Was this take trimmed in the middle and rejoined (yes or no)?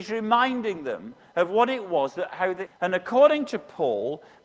yes